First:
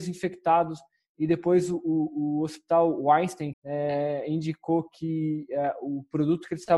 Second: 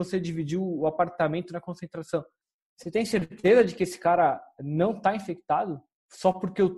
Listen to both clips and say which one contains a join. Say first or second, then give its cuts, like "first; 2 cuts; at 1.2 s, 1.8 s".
first; 1 cut; at 3.5 s